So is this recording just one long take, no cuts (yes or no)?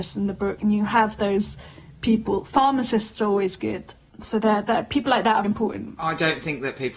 no